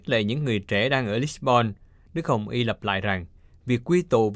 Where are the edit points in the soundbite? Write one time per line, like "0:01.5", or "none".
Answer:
none